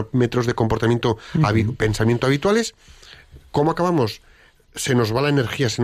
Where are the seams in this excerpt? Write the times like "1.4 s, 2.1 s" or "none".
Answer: none